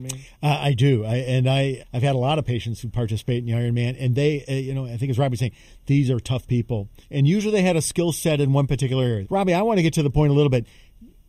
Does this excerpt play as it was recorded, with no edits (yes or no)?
no